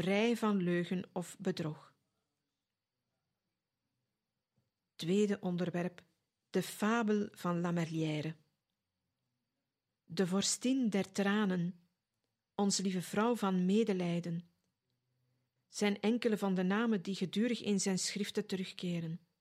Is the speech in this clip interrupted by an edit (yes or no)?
yes